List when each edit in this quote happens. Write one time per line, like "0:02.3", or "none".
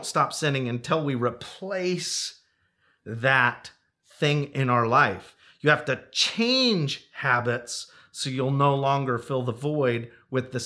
none